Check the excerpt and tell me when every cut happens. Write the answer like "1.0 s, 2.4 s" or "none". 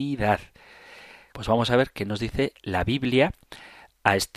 1.3 s